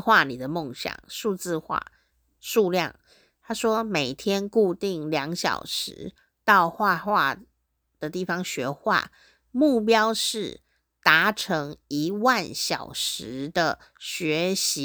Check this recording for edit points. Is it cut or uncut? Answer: uncut